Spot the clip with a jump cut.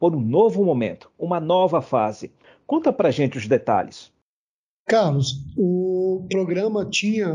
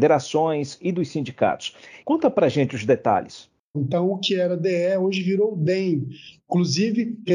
second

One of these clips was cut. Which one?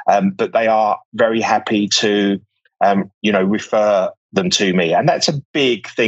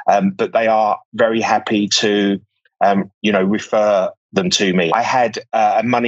second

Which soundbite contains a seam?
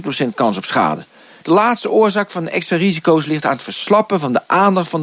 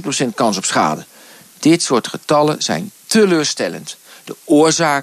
first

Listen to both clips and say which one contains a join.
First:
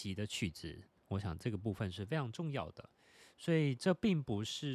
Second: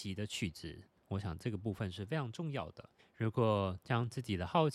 second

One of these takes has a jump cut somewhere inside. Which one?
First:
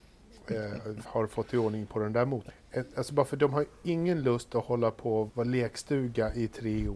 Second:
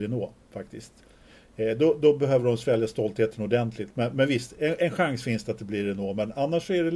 first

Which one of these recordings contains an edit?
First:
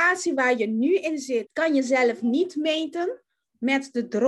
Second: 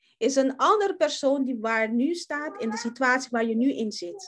first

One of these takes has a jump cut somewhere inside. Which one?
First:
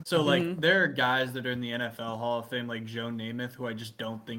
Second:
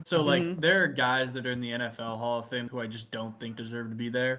second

